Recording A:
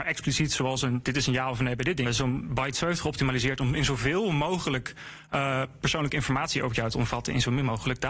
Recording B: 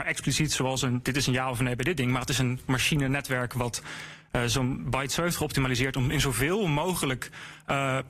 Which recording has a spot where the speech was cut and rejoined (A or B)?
A